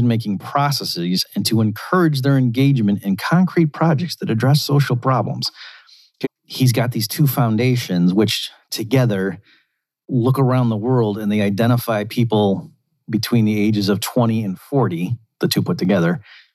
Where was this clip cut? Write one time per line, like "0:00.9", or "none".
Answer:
0:06.2